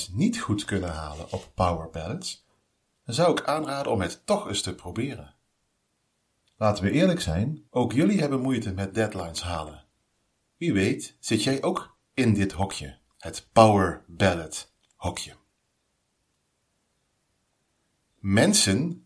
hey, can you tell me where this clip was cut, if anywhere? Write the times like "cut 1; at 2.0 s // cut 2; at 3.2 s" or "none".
cut 1; at 7.7 s